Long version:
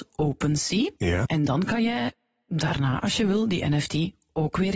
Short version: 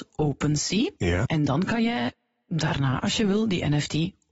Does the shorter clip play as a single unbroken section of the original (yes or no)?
yes